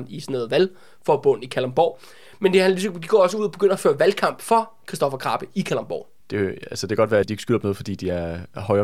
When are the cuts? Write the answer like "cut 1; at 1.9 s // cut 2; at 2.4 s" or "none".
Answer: cut 1; at 6.2 s // cut 2; at 7.2 s